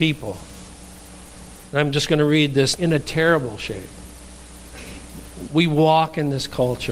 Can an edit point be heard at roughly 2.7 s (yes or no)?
yes